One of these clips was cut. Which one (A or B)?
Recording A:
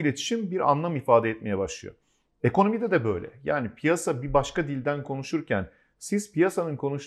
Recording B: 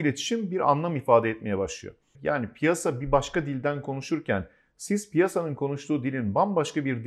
B